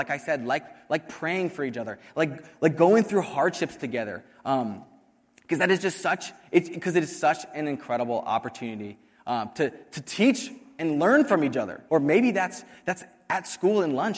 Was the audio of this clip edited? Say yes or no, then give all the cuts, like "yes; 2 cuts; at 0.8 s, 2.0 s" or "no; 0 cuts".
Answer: yes; 1 cut; at 11.9 s